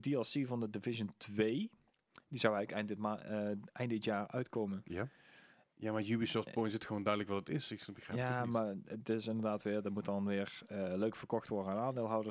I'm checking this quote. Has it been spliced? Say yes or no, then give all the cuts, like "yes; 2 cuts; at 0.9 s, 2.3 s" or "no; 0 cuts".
yes; 1 cut; at 5.7 s